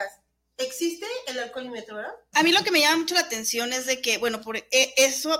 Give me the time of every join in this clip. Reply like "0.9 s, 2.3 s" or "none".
2.3 s